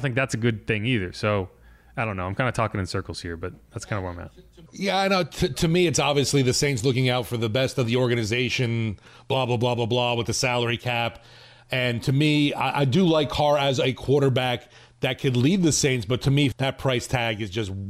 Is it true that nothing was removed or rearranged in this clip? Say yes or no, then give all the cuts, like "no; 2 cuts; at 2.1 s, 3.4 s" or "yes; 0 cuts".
no; 1 cut; at 16.5 s